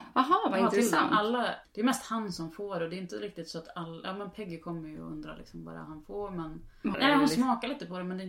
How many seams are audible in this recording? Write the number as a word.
two